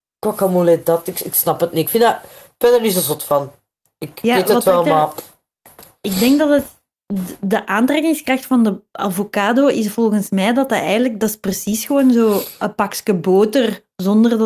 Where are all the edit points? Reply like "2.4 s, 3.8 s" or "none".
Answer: none